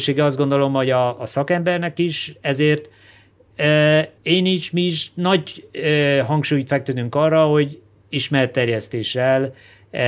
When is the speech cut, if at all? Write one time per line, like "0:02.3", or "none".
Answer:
0:04.2

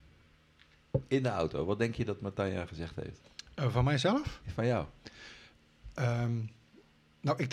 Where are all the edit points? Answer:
none

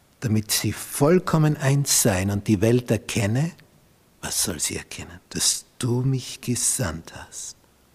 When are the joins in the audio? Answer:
0:05.3

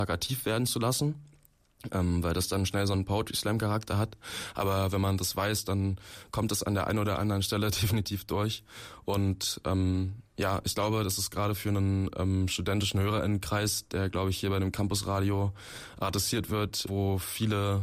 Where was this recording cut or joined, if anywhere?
0:16.9

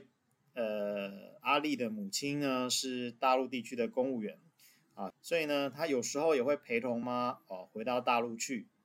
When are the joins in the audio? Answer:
0:05.1
0:07.0

